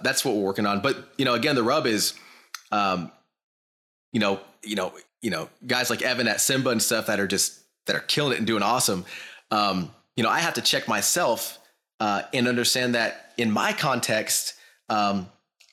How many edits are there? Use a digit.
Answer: 1